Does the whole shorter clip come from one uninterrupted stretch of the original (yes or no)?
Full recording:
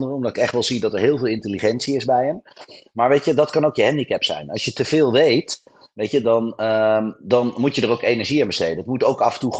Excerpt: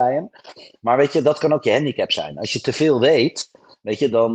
yes